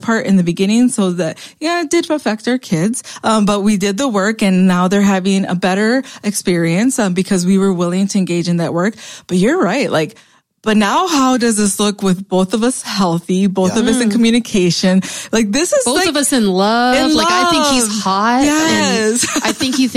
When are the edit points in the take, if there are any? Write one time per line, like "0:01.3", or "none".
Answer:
none